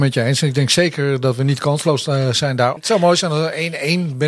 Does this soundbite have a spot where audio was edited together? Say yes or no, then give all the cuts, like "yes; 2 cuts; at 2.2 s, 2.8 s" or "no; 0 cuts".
yes; 1 cut; at 2.8 s